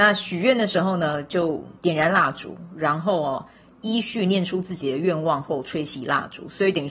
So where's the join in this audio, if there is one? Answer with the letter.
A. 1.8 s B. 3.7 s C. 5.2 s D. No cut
A